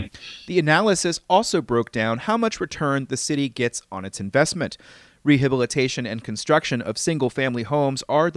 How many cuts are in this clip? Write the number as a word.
zero